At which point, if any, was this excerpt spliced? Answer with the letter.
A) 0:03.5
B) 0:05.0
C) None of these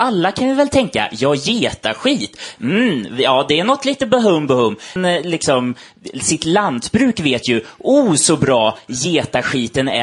B